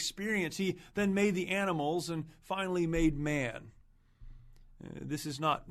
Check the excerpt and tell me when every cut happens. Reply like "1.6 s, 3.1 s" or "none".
none